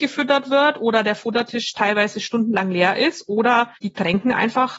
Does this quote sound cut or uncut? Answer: cut